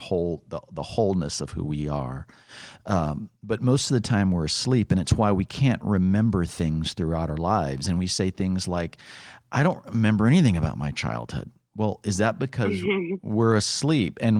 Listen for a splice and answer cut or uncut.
uncut